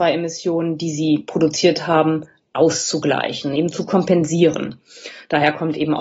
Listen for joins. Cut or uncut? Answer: uncut